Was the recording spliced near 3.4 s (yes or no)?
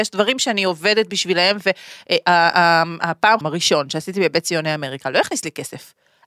yes